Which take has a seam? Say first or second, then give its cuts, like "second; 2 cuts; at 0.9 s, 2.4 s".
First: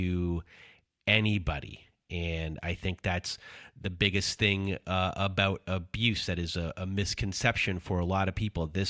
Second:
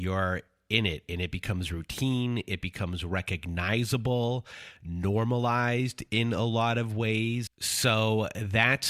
second; 1 cut; at 7.5 s